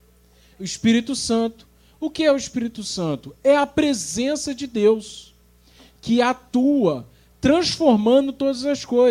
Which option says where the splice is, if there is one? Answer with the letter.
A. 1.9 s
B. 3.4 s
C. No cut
C